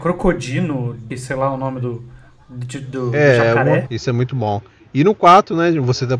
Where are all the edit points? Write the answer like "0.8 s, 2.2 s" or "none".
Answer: 1.1 s, 3.9 s